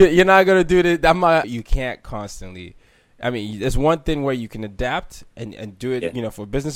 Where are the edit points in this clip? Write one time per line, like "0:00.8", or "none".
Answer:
0:01.4